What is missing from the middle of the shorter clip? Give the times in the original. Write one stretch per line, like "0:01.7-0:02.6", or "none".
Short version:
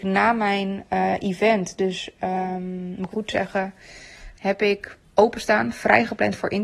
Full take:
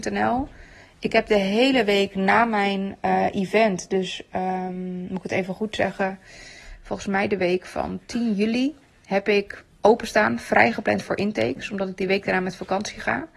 0:05.2-0:05.6
0:06.8-0:09.0

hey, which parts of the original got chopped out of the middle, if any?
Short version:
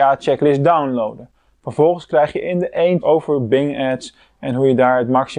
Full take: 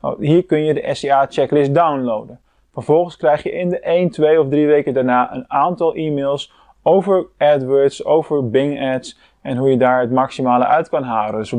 0:04.1-0:08.0

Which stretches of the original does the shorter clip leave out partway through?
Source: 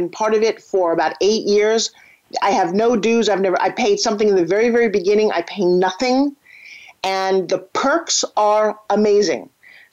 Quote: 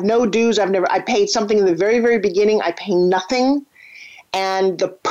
none

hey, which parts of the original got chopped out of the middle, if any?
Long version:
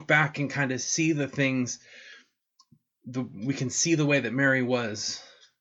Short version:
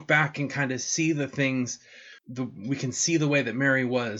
0:02.2-0:03.0

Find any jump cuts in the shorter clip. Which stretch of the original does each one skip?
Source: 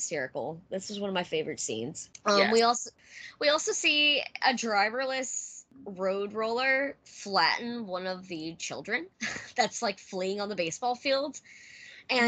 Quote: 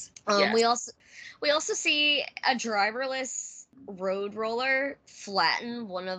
none

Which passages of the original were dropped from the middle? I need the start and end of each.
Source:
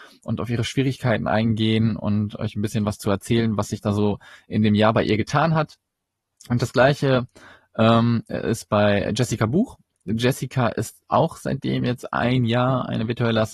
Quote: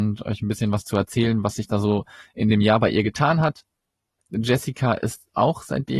0:06.3-0:09.9

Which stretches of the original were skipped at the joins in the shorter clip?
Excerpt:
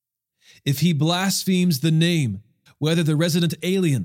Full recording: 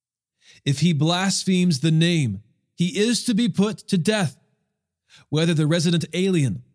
0:02.7-0:05.2

